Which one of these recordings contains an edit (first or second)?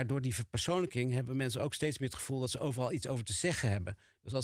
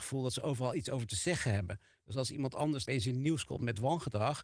second